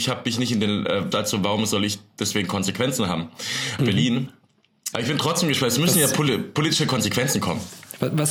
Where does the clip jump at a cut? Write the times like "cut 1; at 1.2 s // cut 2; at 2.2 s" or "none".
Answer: cut 1; at 1.1 s // cut 2; at 3.8 s // cut 3; at 4.9 s